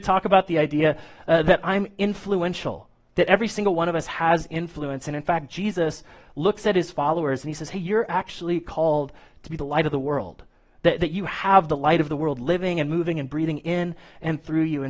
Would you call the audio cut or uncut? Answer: uncut